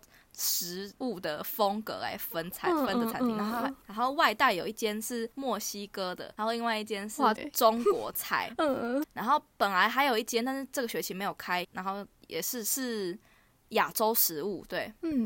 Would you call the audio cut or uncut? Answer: cut